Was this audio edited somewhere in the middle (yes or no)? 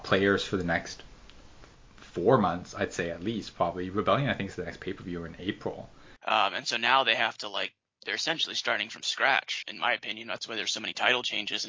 yes